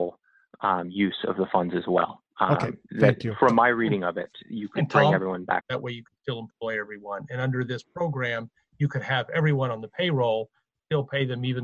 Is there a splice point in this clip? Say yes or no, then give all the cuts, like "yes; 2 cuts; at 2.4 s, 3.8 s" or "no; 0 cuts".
yes; 1 cut; at 5.6 s